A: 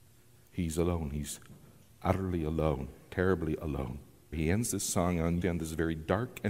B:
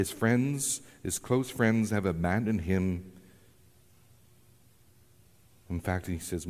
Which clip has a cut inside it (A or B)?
A